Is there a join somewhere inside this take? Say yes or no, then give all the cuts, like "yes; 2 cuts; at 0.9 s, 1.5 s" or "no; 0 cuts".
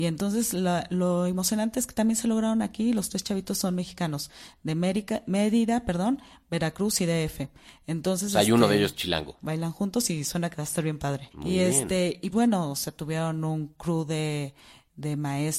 yes; 3 cuts; at 9.4 s, 11.3 s, 12.3 s